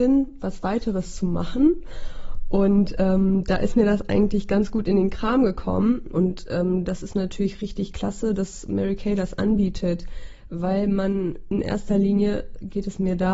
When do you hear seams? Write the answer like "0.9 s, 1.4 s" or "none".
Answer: 6.1 s